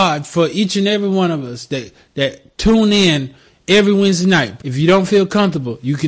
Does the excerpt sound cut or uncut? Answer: cut